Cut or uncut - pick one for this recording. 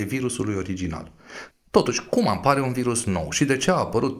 cut